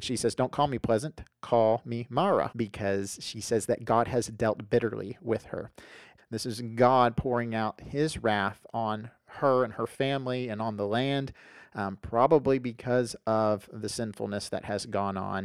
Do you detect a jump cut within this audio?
yes; 2 cuts; at 2.5 s, 6.2 s

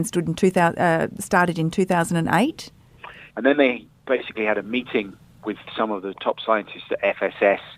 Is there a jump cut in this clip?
yes; 2 cuts; at 3.3 s, 6.1 s

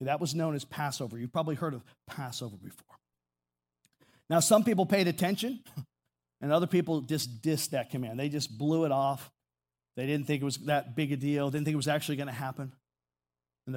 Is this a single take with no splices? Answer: yes; 0 cuts

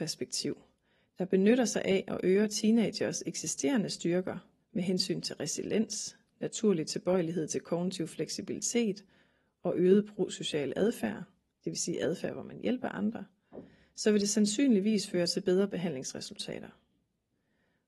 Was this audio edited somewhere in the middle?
no; 0 cuts

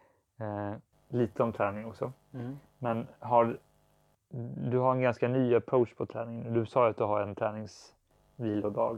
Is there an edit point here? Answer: no; 0 cuts

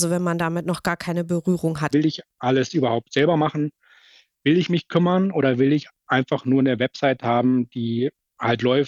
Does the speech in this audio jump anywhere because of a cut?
yes; 1 cut; at 1.9 s

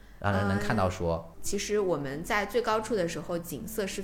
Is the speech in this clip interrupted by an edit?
yes; 1 cut; at 1.3 s

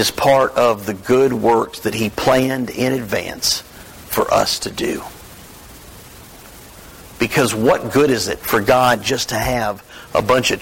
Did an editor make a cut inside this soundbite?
no; 0 cuts

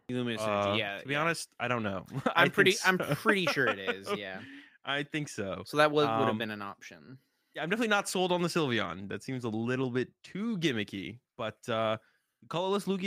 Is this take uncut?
yes; 0 cuts

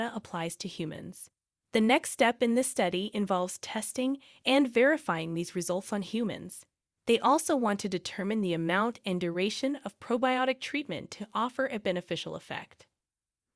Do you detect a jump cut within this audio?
no; 0 cuts

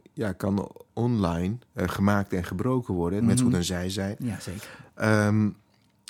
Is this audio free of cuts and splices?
no; 2 cuts; at 1.6 s, 3.2 s

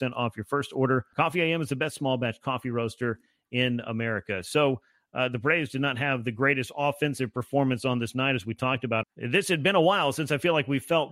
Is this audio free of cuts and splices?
no; 2 cuts; at 1.1 s, 9.0 s

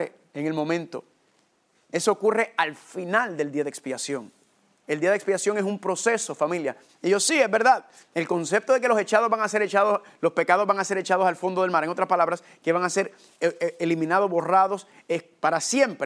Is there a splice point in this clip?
yes; 1 cut; at 6.9 s

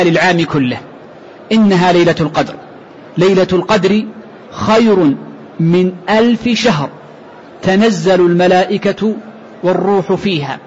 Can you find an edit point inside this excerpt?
no; 0 cuts

